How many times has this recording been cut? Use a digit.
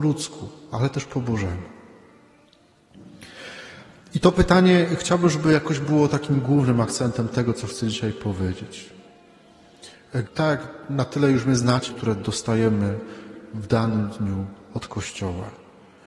2